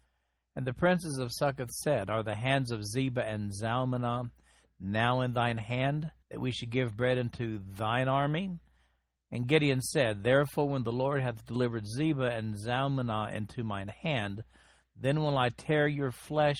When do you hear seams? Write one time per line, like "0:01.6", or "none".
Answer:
0:06.2